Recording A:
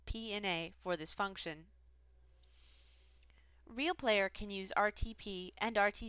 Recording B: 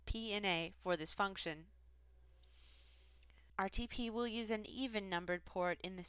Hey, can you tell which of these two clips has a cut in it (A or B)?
B